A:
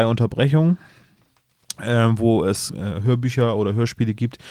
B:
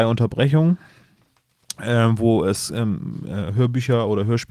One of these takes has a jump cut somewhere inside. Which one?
A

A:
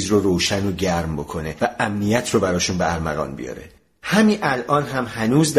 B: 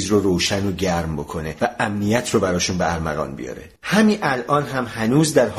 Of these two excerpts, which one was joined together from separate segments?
B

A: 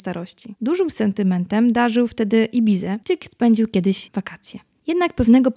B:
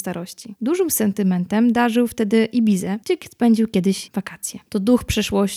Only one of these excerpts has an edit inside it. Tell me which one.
B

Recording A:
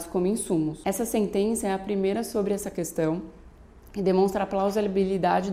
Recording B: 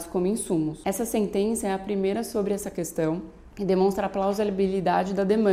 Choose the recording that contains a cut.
B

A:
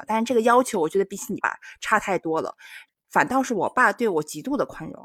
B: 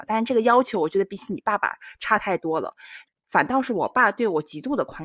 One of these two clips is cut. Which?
A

